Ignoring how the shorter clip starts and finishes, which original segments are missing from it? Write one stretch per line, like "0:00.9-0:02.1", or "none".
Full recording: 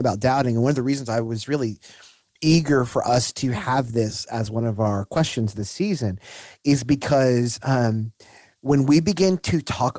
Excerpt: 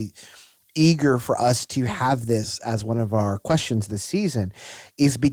none